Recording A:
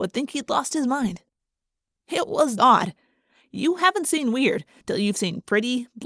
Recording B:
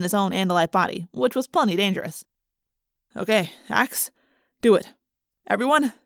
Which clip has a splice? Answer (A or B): A